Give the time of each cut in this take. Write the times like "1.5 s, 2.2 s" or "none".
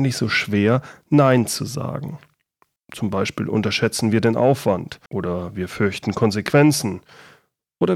2.8 s, 5.1 s